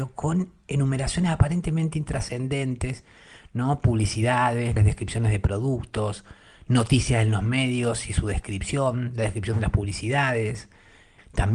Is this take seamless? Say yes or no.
no